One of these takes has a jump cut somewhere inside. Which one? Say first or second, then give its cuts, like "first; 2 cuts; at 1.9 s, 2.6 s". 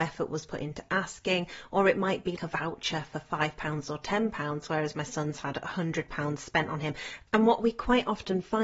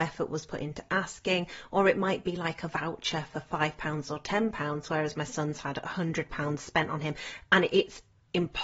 first; 2 cuts; at 2.4 s, 7.3 s